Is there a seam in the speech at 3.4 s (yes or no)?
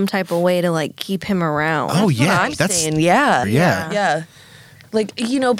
yes